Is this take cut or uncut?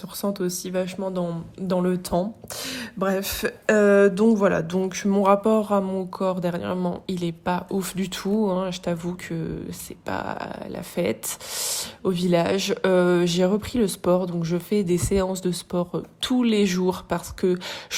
uncut